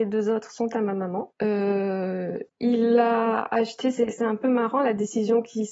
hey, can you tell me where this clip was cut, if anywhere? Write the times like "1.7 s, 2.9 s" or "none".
none

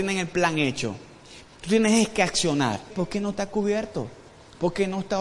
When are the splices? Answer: 1.5 s, 2.9 s

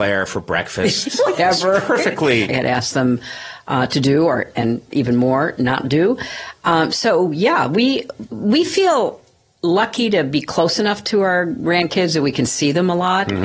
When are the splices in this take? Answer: 2.5 s

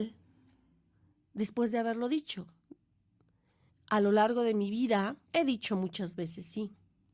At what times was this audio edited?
3.7 s, 5.2 s

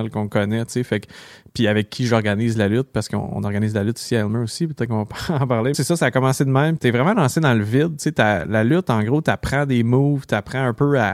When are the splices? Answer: 5.7 s, 6.8 s

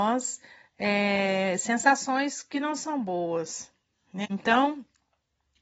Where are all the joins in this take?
4.2 s

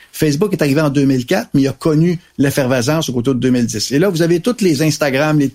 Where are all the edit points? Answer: none

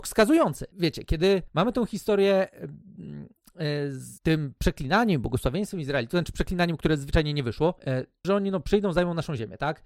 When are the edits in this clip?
8.2 s

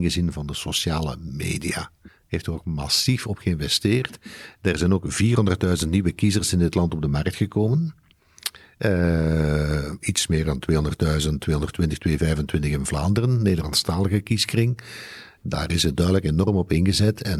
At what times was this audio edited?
none

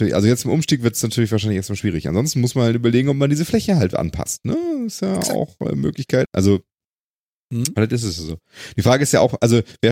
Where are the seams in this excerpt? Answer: 6.3 s

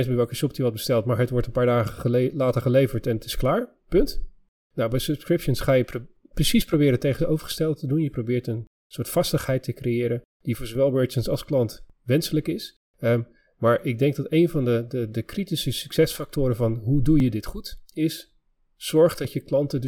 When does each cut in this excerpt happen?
none

